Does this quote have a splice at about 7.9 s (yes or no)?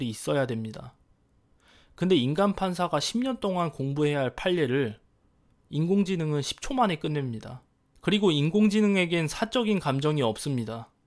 no